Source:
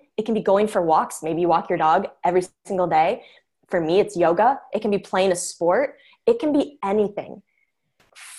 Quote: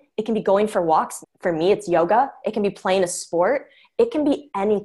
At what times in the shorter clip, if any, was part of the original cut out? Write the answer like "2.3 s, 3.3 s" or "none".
1.2 s